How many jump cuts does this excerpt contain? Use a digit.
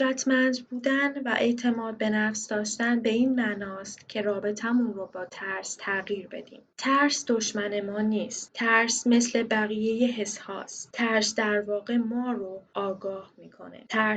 0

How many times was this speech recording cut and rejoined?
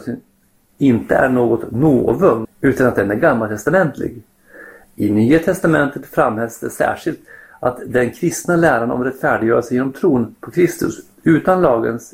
2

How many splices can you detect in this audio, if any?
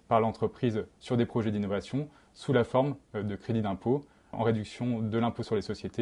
1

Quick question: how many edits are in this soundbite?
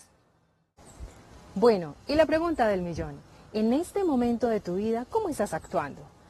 0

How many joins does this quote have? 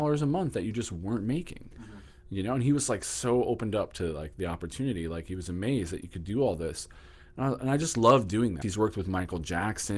1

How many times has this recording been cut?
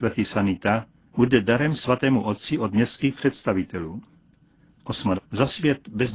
2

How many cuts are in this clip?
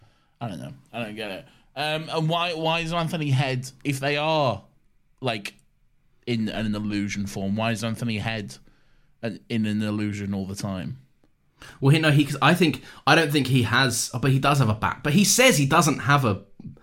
0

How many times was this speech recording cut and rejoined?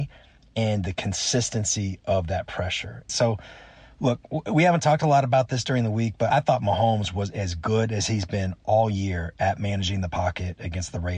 2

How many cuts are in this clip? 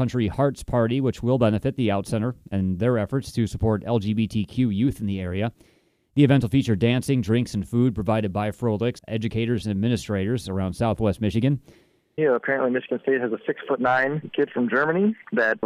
2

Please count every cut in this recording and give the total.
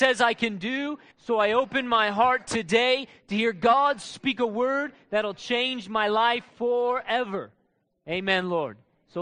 1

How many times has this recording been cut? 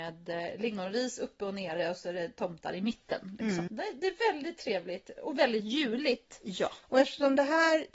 2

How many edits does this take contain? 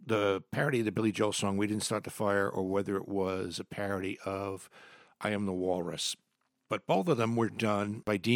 0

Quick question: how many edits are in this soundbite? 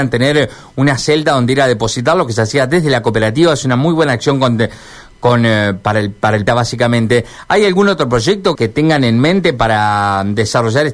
2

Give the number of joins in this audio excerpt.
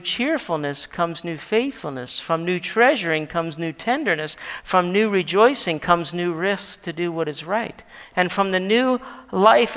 2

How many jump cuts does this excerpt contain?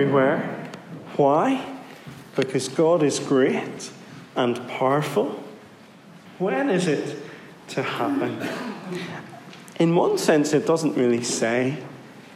1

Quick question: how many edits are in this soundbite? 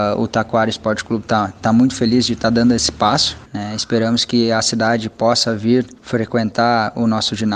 2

